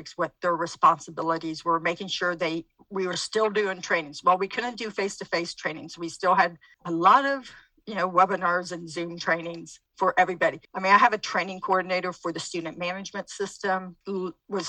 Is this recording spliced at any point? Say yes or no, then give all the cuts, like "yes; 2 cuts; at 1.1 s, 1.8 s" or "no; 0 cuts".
no; 0 cuts